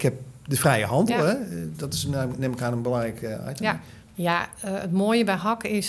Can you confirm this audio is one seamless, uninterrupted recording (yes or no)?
no